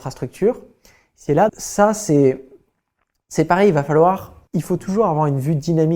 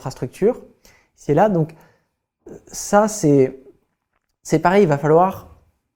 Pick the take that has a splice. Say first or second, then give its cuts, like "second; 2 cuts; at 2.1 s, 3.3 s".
first; 2 cuts; at 1.5 s, 4.5 s